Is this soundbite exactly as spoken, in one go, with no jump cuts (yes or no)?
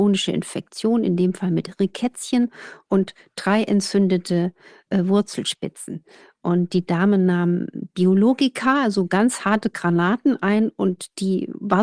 yes